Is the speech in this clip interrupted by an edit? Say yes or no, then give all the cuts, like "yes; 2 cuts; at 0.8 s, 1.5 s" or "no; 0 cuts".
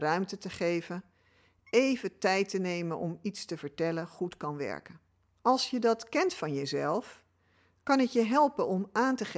yes; 1 cut; at 5.4 s